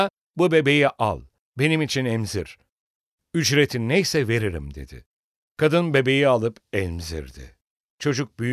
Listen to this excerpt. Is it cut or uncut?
uncut